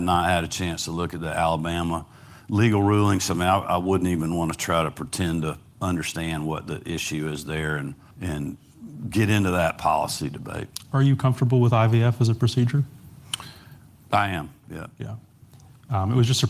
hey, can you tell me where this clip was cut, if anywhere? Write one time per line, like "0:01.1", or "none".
0:08.1

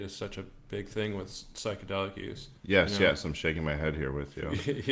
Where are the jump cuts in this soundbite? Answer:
0:02.6

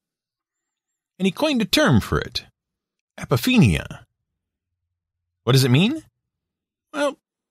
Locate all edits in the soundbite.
none

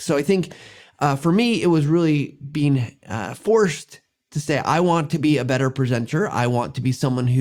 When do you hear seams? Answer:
none

